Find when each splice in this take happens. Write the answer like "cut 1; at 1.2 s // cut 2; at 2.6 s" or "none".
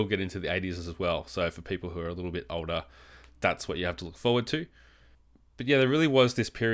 none